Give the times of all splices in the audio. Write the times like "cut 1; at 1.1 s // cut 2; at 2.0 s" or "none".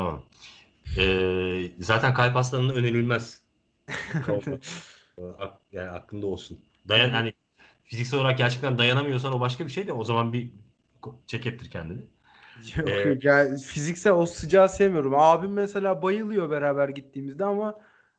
cut 1; at 11.2 s